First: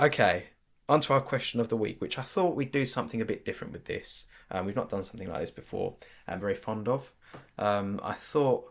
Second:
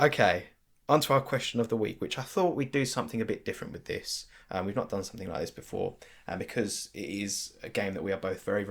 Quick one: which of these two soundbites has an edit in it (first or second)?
first